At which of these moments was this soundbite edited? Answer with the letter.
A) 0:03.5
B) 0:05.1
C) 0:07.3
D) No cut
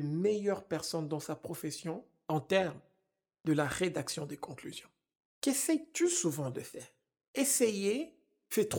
D